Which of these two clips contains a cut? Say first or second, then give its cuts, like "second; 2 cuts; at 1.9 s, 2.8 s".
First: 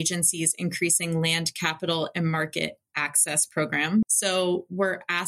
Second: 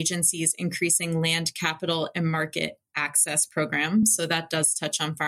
first; 1 cut; at 4.0 s